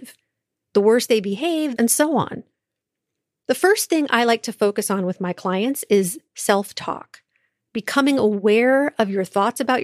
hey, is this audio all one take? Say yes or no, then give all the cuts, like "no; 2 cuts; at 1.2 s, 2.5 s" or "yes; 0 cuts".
no; 1 cut; at 1.8 s